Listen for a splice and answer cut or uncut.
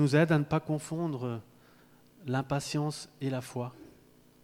uncut